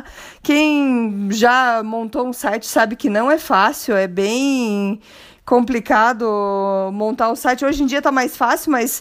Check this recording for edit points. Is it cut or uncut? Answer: uncut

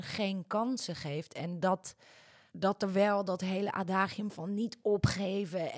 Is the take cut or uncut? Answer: uncut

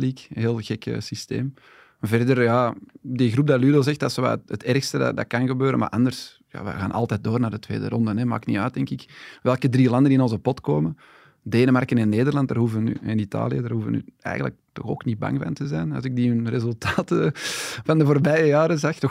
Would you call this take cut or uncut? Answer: uncut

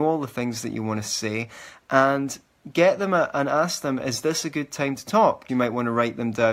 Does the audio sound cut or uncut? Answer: cut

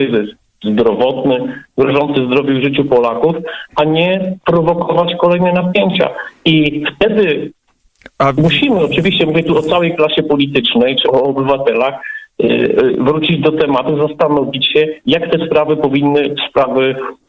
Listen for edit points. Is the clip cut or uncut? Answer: cut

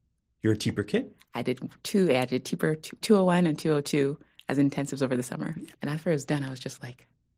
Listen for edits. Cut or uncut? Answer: cut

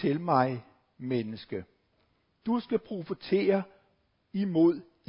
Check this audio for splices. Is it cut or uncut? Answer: uncut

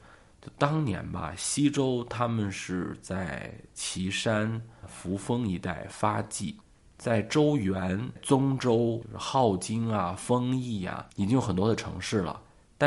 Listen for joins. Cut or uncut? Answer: uncut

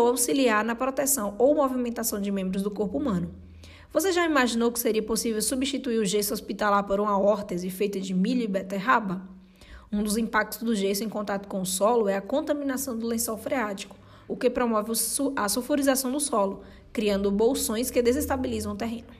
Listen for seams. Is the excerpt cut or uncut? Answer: cut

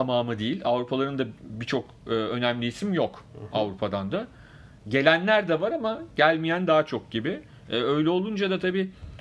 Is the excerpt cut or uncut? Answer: uncut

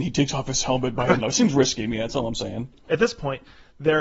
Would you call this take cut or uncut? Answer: cut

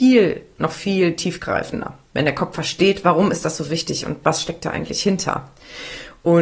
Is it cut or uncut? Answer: uncut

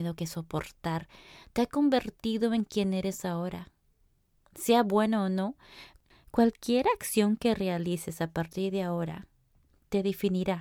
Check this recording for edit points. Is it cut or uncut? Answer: uncut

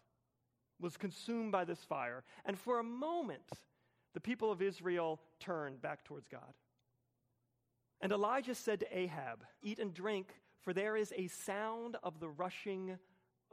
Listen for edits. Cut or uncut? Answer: cut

